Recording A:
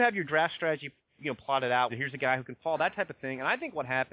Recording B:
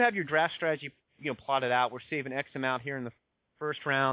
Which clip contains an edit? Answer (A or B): A